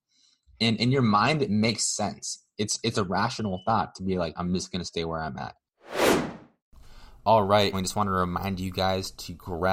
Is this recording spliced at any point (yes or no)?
yes